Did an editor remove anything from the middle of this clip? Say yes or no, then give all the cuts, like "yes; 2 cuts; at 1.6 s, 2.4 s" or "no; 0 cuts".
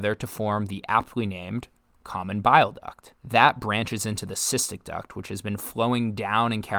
yes; 1 cut; at 3.2 s